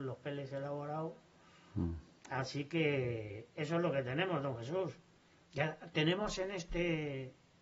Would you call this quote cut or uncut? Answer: uncut